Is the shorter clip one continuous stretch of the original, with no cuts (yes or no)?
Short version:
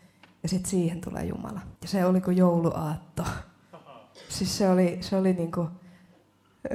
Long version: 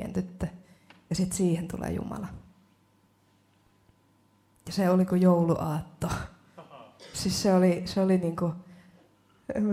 no